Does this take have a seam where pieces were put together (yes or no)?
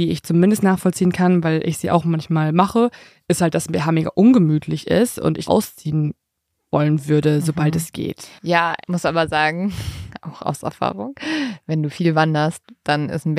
yes